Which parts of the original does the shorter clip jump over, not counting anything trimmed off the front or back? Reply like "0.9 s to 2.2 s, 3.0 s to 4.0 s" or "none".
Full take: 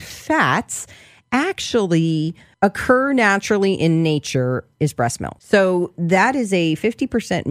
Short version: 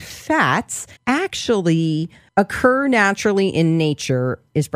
1.0 s to 1.2 s